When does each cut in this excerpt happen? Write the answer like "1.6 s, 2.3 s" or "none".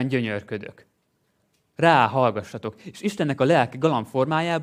none